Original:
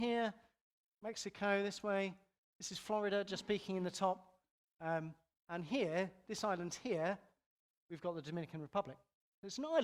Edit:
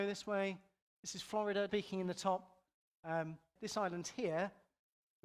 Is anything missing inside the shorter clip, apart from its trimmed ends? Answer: yes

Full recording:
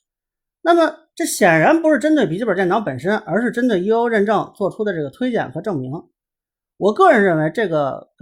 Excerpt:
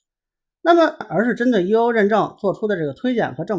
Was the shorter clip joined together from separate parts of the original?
yes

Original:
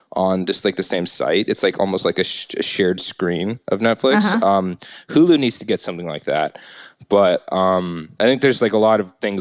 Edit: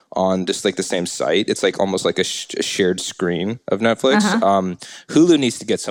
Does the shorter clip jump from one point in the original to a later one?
no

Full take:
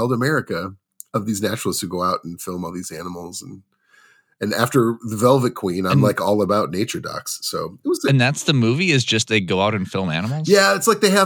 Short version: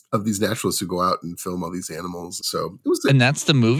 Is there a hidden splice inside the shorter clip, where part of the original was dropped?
yes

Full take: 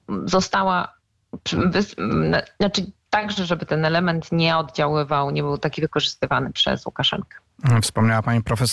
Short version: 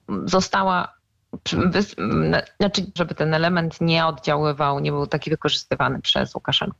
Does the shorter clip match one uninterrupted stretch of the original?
no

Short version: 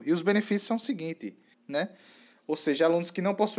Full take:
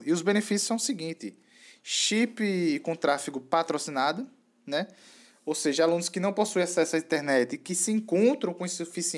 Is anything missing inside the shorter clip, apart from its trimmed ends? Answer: yes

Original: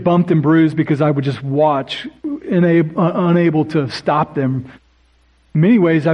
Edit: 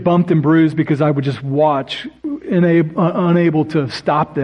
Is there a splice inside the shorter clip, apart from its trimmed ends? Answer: no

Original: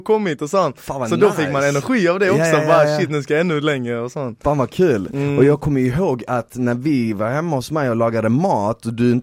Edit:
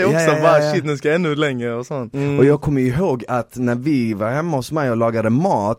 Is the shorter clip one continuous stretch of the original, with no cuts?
no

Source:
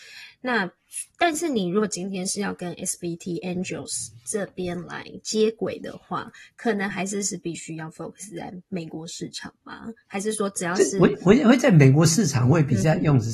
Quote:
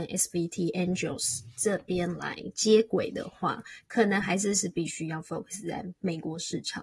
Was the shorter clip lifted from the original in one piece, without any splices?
yes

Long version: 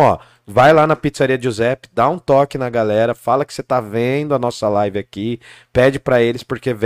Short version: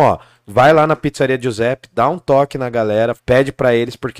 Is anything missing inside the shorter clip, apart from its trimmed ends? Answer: yes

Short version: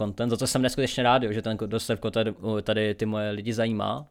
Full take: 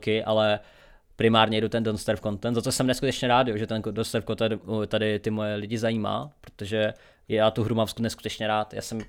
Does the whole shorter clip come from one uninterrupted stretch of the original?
yes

